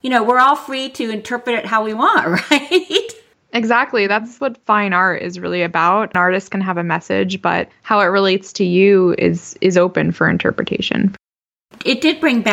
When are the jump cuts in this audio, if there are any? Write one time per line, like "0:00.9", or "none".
none

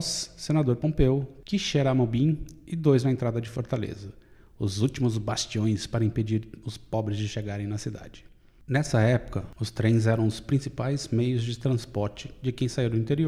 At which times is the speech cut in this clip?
none

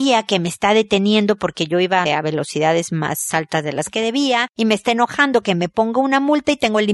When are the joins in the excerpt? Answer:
0:02.1

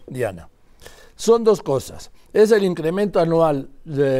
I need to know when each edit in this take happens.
none

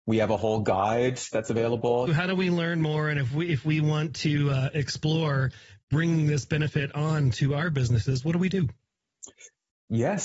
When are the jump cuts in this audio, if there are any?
0:02.1

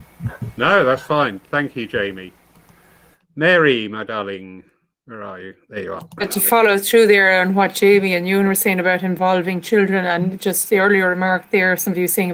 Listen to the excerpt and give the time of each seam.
none

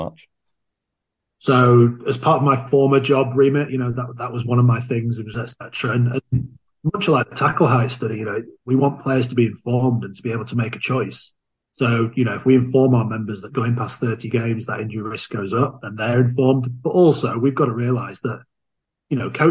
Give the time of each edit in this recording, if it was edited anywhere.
0:05.3

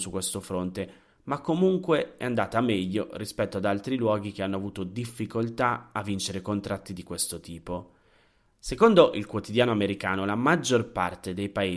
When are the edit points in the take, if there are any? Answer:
0:08.5

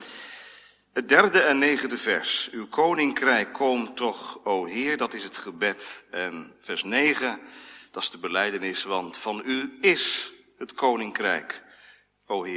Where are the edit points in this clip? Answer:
none

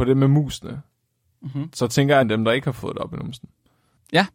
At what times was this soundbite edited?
0:02.2

